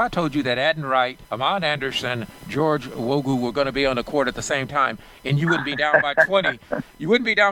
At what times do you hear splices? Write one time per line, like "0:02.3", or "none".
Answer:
0:01.2